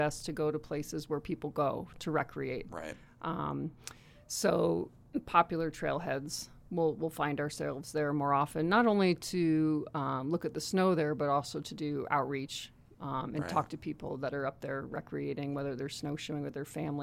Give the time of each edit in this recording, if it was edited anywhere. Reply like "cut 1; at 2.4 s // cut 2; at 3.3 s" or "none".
none